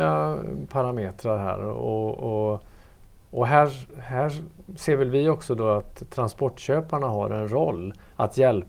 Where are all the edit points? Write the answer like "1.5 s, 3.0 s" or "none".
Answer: none